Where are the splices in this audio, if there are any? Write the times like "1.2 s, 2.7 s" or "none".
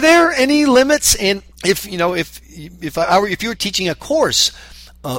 1.5 s, 3.5 s